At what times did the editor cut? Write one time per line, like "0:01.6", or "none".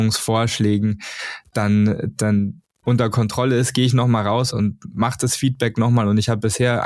0:02.6
0:04.5